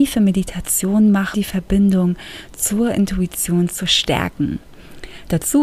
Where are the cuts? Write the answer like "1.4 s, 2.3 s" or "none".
1.3 s